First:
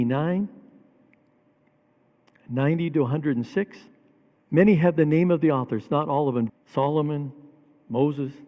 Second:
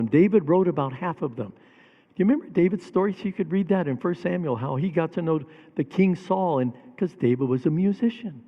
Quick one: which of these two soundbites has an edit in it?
first; 2 cuts; at 4.4 s, 6.5 s

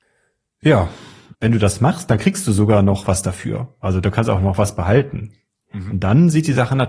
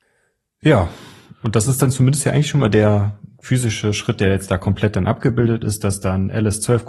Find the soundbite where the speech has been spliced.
first; 1 cut; at 1.3 s

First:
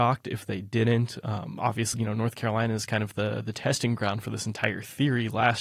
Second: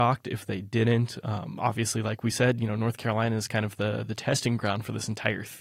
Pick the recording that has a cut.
first; 1 cut; at 1.9 s

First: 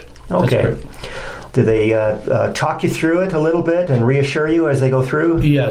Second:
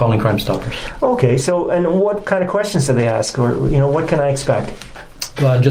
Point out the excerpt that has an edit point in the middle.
first; 1 cut; at 1.5 s

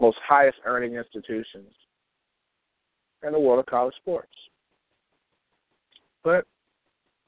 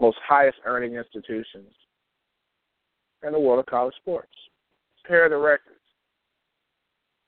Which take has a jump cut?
second; 1 cut; at 5.0 s

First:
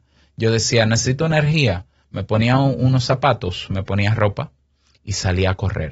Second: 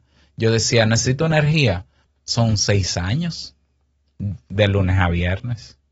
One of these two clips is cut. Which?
second; 1 cut; at 2.1 s

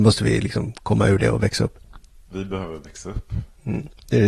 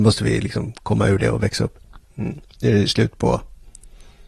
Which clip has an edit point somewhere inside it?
second; 1 cut; at 2.0 s

